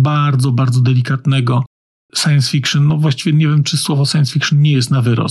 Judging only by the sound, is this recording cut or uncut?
uncut